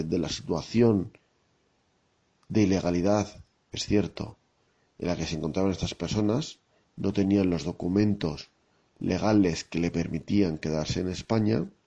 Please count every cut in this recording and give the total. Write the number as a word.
zero